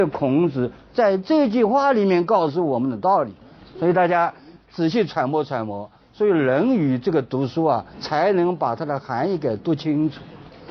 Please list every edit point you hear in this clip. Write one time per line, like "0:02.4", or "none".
0:07.9